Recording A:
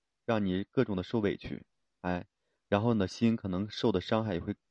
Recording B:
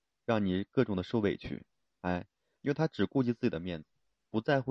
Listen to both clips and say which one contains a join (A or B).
B